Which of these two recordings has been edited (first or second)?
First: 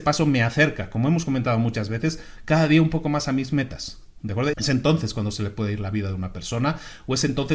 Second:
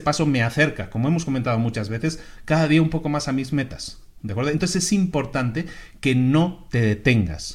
first